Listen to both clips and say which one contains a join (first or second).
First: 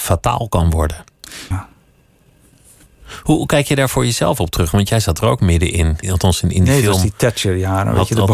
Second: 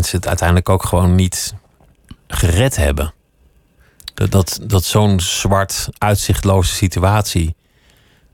first